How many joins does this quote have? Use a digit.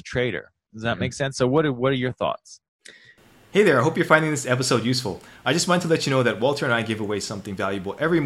0